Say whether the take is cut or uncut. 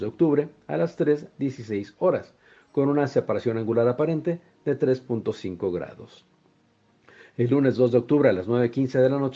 uncut